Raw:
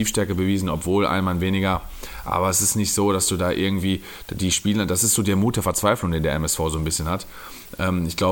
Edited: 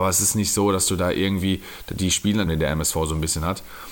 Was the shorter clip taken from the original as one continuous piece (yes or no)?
no